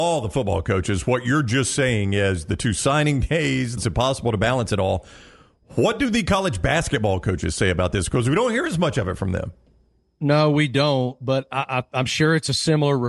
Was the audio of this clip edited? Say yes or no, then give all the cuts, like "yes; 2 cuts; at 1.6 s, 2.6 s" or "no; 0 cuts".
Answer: yes; 1 cut; at 3.8 s